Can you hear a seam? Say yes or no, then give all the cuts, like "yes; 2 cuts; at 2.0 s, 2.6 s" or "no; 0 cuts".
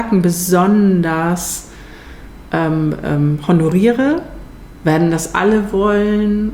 no; 0 cuts